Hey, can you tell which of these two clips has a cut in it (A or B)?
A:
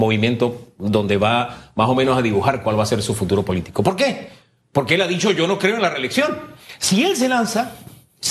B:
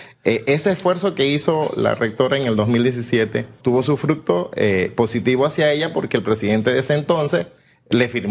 B